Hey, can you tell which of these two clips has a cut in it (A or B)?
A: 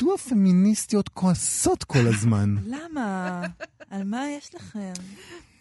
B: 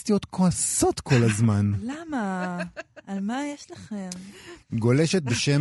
B